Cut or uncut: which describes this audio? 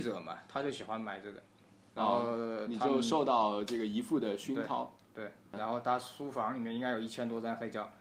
cut